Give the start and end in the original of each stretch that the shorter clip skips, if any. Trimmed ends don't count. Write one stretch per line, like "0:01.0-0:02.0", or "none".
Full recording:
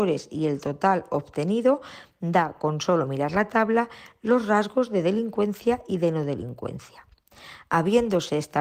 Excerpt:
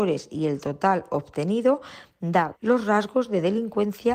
0:02.5-0:04.1